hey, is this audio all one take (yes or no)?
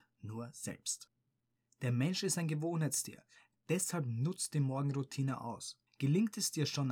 no